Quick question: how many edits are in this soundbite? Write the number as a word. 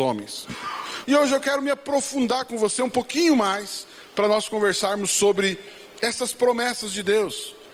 one